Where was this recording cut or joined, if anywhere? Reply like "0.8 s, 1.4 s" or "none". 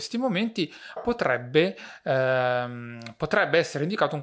1.0 s